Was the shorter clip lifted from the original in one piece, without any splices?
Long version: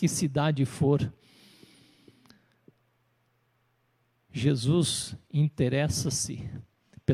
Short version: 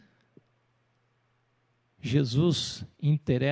yes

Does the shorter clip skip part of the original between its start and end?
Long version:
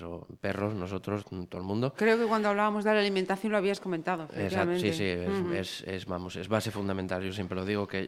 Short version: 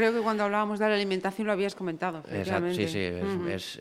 no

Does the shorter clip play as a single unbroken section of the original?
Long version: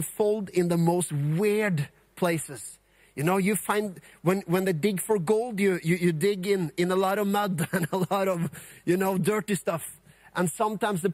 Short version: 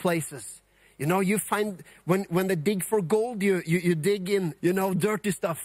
no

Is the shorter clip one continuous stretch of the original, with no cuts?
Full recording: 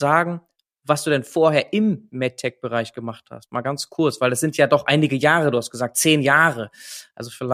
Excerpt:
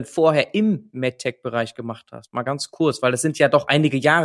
yes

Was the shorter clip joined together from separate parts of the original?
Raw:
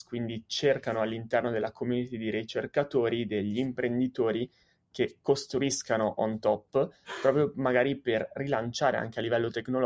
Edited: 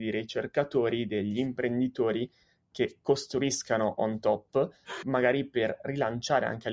yes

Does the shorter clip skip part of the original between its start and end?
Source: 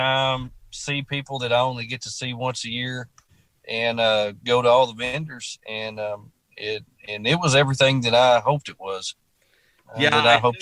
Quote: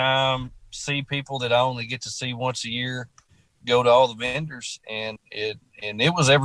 yes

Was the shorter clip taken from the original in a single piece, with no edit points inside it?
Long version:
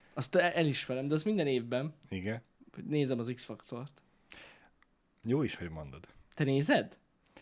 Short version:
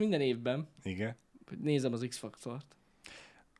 yes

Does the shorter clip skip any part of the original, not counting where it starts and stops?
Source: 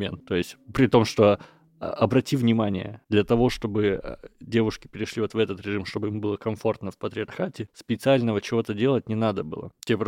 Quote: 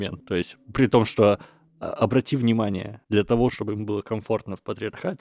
yes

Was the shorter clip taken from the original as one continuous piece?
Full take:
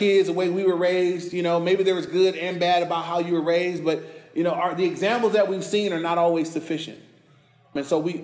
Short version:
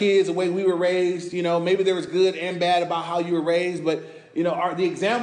yes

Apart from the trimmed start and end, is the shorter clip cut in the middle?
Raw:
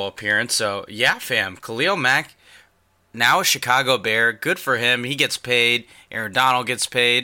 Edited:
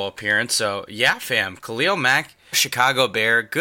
yes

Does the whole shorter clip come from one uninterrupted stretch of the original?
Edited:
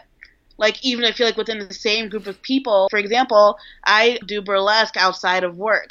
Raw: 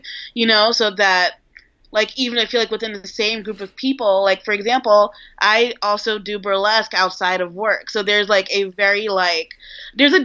no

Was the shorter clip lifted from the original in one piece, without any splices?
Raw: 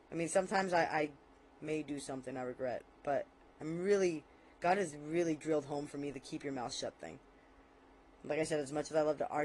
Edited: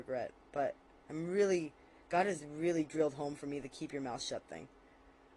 yes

